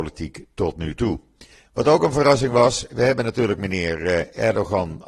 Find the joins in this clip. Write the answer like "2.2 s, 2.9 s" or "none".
1.6 s